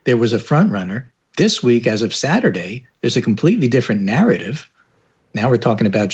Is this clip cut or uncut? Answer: uncut